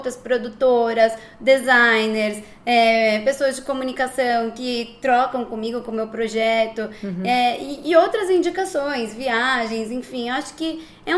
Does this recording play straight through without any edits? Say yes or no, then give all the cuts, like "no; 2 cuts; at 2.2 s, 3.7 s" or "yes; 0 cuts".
yes; 0 cuts